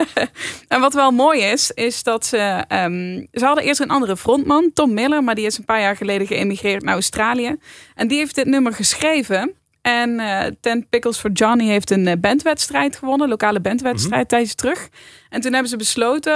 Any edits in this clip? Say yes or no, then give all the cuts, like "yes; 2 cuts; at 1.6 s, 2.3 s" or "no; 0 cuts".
no; 0 cuts